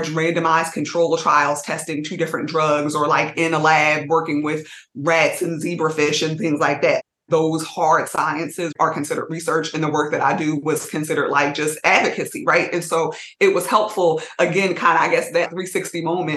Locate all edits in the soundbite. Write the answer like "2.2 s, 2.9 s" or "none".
none